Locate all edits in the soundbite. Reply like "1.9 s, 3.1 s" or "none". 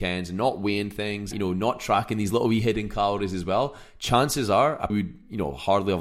1.3 s, 4.9 s